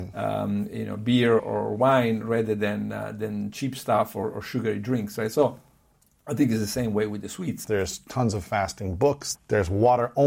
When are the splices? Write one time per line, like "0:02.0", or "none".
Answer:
0:01.4
0:07.6
0:09.3